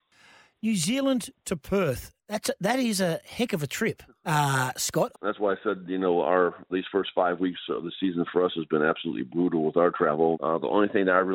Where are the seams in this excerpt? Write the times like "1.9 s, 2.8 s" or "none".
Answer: 5.1 s, 6.7 s, 10.3 s